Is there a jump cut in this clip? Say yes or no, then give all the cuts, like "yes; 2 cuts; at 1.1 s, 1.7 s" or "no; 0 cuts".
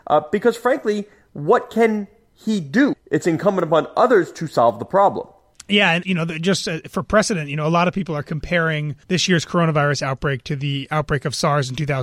yes; 3 cuts; at 2.9 s, 6.0 s, 9.0 s